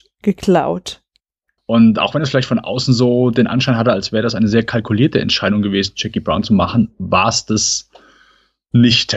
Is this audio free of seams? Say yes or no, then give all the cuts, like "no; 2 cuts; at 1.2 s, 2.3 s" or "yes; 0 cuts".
no; 1 cut; at 1.6 s